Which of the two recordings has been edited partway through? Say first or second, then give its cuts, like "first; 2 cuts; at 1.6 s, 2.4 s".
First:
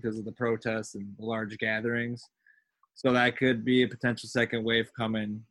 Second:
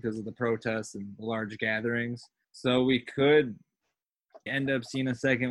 second; 2 cuts; at 2.4 s, 4.5 s